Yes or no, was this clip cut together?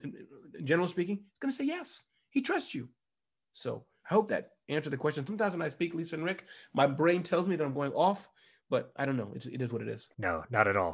no